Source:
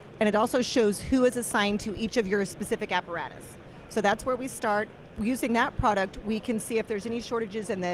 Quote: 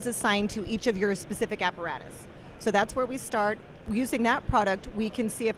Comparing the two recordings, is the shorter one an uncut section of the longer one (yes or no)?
yes